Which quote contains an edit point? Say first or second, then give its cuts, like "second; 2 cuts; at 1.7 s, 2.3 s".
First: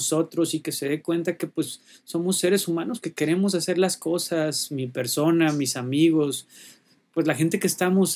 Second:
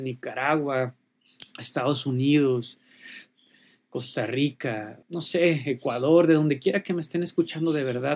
second; 1 cut; at 5.0 s